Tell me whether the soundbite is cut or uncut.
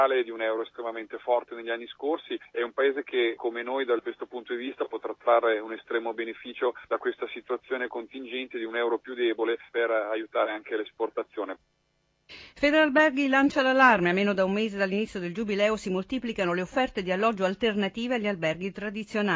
uncut